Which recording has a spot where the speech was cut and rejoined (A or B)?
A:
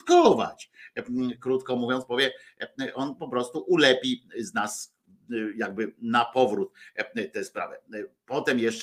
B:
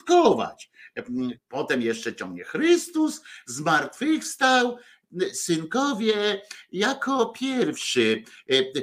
B